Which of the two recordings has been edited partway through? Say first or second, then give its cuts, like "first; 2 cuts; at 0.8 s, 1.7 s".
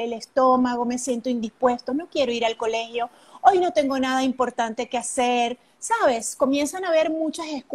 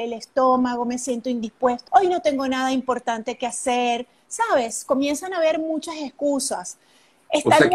second; 1 cut; at 1.9 s